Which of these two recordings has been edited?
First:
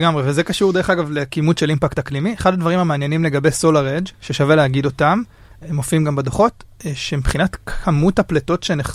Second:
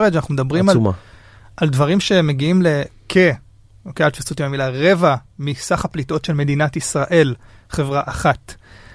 first; 1 cut; at 4.1 s

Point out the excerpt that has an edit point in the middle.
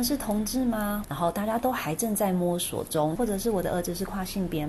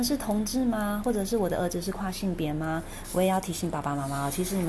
first; 2 cuts; at 1.0 s, 3.2 s

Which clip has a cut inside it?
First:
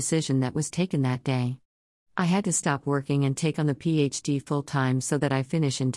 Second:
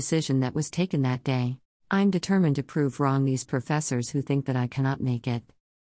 second; 1 cut; at 1.7 s

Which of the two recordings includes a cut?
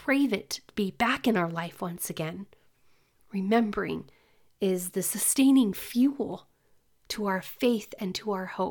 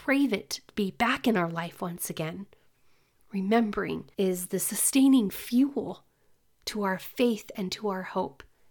second; 1 cut; at 4.1 s

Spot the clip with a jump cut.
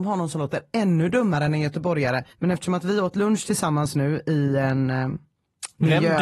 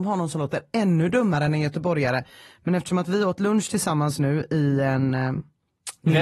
first; 1 cut; at 2.3 s

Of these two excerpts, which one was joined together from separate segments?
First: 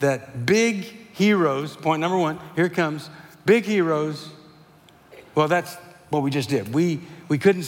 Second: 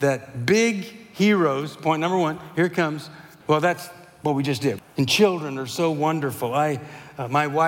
second; 2 cuts; at 3.4 s, 4.8 s

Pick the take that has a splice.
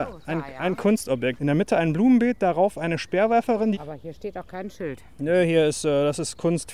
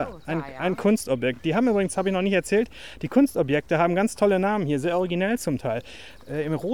first; 2 cuts; at 1.4 s, 3.7 s

